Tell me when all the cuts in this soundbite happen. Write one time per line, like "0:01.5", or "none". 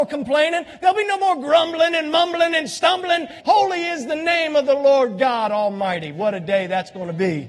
0:03.4

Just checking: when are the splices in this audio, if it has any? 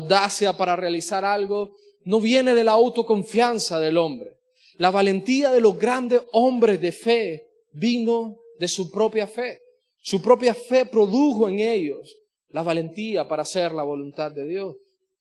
none

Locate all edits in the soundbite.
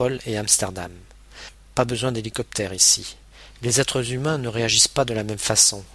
0:01.5
0:03.5

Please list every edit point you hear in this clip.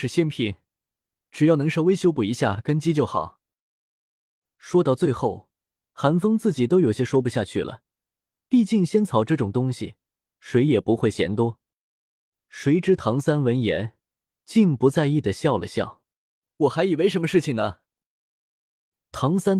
none

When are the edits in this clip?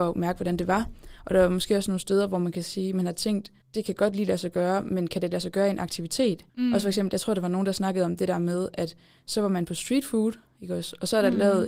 0:03.6
0:06.5

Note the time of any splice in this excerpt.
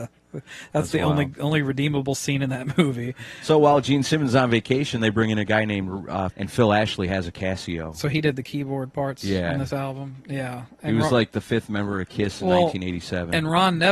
0:06.3

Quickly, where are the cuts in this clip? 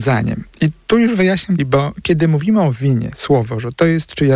0:01.6

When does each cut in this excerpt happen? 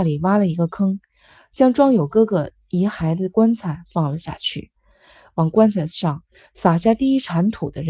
none

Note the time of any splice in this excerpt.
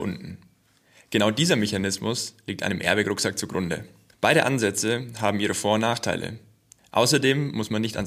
0:04.1
0:06.8

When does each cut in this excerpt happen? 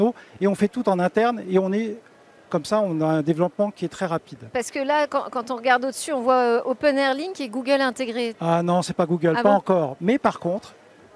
0:08.3

